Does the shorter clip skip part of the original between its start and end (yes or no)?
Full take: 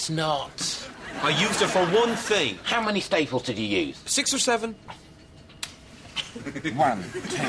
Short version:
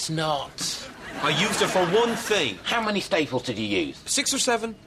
no